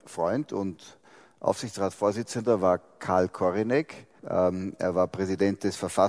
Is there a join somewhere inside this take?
yes; 1 cut; at 4.2 s

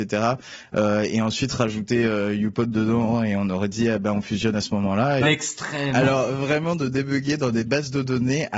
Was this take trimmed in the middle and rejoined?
yes; 1 cut; at 5.2 s

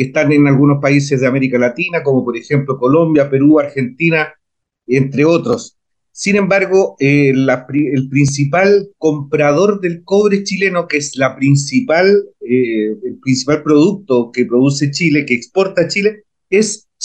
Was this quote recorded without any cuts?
yes; 0 cuts

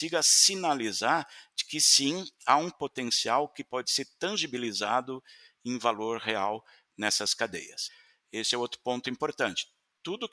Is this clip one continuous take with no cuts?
yes; 0 cuts

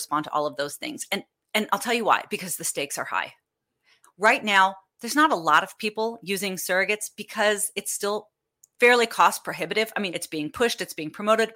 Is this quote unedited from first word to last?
no; 2 cuts; at 4.0 s, 10.1 s

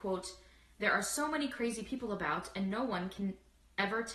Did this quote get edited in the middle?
no; 0 cuts

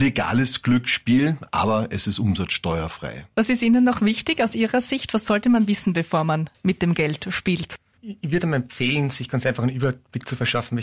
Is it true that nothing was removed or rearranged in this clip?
yes; 0 cuts

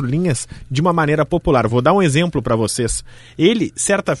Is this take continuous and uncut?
yes; 0 cuts

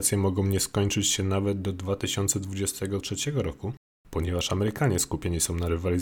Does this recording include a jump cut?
no; 0 cuts

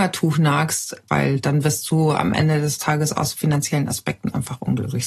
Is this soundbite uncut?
no; 1 cut; at 1.1 s

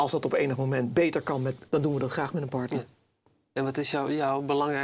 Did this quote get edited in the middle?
yes; 1 cut; at 1.7 s

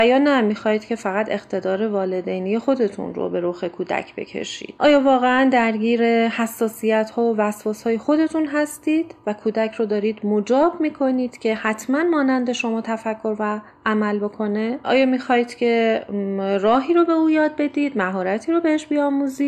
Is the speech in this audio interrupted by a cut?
yes; 1 cut; at 14.8 s

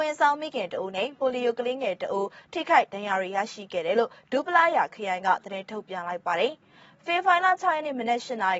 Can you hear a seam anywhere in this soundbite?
no; 0 cuts

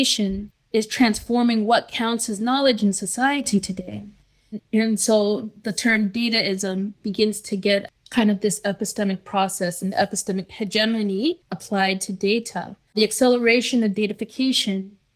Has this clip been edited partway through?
yes; 2 cuts; at 4.6 s, 12.9 s

